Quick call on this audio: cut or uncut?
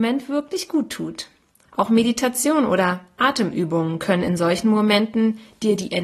cut